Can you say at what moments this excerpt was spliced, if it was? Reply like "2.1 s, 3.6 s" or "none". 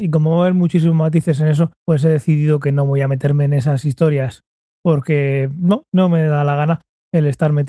1.8 s, 5.9 s